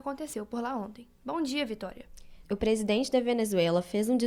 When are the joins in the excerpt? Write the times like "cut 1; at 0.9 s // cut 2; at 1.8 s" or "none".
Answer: cut 1; at 2.4 s